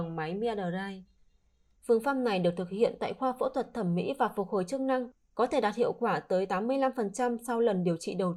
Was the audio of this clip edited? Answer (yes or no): yes